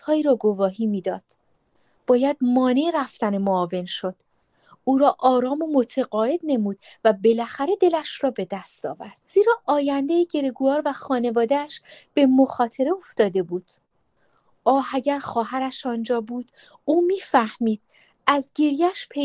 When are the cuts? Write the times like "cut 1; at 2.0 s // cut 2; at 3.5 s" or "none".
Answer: cut 1; at 9.2 s